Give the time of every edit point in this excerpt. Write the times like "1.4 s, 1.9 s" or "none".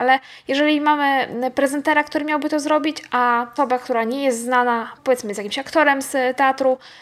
3.6 s